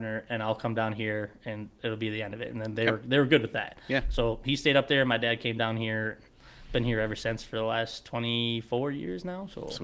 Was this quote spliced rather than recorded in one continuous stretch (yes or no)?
no